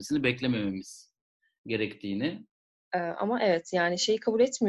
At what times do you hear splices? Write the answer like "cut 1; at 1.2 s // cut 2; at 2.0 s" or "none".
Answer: cut 1; at 2.7 s